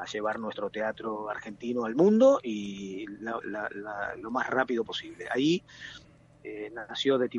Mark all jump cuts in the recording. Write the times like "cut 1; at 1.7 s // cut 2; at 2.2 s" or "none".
cut 1; at 3.4 s

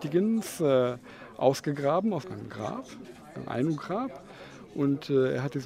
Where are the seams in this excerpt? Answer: cut 1; at 2.2 s

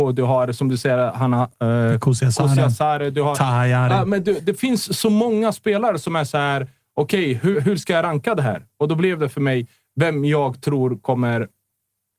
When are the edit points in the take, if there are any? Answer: cut 1; at 7.5 s

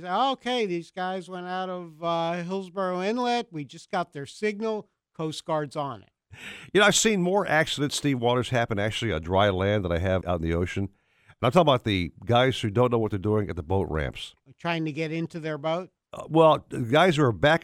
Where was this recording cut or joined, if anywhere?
cut 1; at 10.2 s

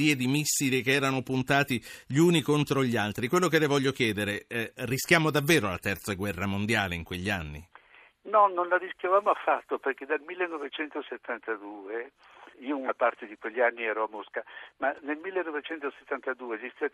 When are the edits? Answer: cut 1; at 12.5 s

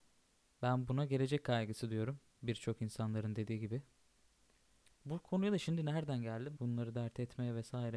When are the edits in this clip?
cut 1; at 6.6 s

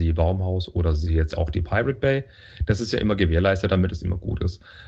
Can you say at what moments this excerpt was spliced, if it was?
none

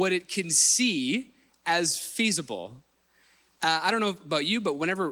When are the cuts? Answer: none

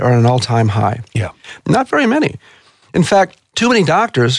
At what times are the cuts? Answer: cut 1; at 1.6 s

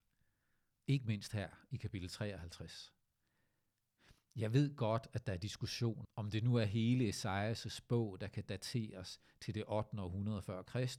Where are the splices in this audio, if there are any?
cut 1; at 6.0 s

